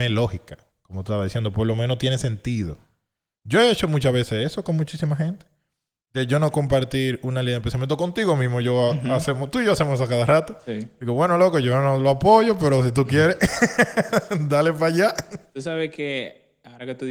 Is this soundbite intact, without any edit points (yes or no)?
yes